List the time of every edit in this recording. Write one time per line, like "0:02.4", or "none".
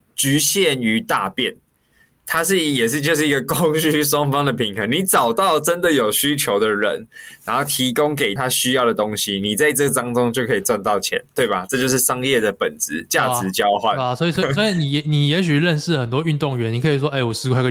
0:08.4